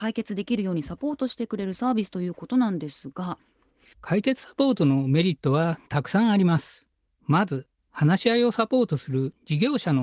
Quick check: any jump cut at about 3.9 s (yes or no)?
yes